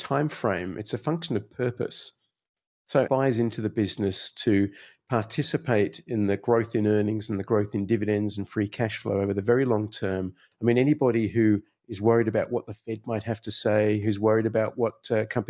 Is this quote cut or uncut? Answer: cut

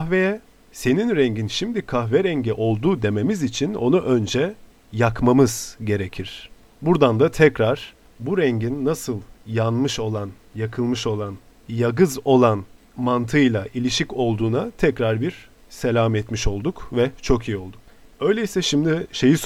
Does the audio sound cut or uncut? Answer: uncut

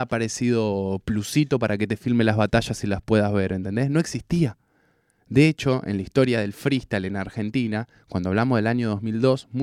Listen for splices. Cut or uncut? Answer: uncut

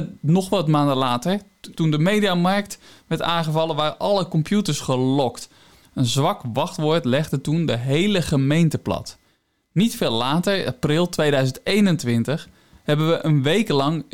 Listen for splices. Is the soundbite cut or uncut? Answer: cut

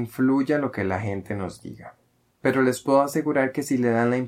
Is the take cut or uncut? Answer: cut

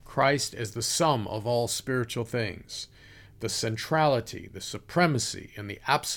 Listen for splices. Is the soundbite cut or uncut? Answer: uncut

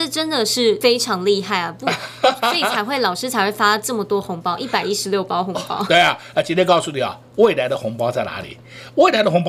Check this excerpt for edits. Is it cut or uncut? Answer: uncut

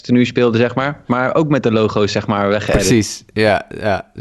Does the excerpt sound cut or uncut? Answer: uncut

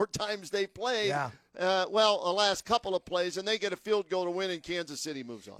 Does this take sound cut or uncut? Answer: uncut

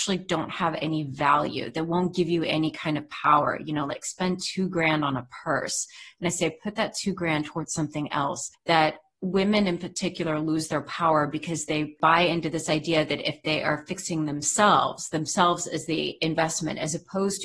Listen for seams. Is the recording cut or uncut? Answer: uncut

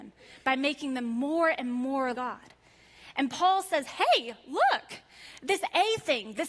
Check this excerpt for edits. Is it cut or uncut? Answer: cut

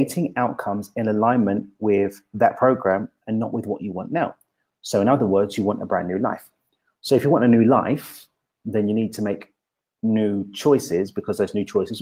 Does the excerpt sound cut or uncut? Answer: uncut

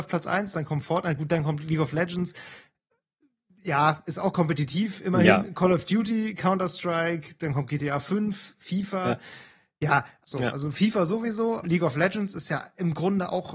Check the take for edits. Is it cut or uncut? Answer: cut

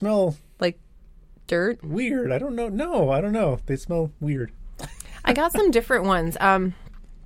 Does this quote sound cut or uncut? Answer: uncut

